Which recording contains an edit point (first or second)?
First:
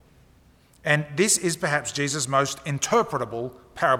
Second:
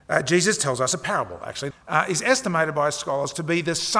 second